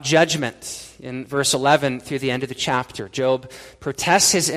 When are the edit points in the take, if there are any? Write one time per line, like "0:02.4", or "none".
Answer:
none